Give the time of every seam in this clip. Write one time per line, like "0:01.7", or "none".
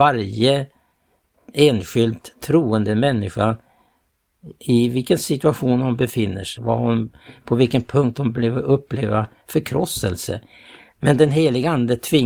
0:06.6
0:10.8